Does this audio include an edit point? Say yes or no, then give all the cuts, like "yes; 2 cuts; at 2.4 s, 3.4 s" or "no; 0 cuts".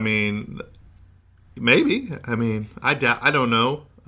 no; 0 cuts